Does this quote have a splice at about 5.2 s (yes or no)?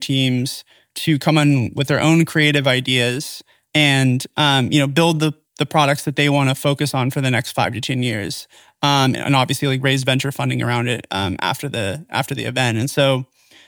no